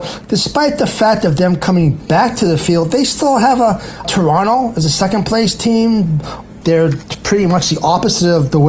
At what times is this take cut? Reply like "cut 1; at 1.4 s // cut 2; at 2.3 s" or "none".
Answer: cut 1; at 4.0 s // cut 2; at 6.6 s